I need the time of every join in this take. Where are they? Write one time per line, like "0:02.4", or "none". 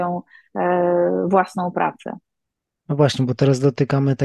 none